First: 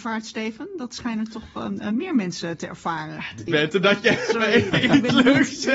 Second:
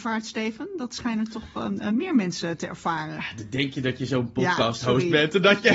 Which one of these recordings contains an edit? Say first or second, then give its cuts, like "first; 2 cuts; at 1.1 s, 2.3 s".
first; 1 cut; at 3.5 s